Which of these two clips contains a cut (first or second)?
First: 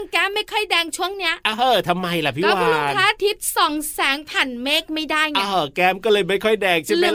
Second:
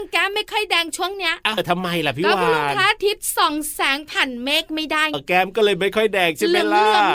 second